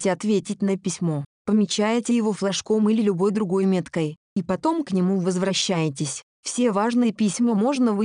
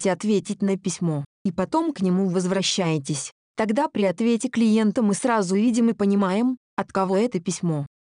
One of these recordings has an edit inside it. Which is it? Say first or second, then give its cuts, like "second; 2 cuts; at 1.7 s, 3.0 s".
second; 2 cuts; at 1.3 s, 3.4 s